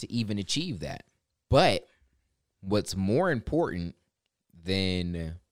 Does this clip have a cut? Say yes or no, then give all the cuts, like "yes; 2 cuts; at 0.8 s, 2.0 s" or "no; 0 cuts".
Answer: yes; 1 cut; at 1.5 s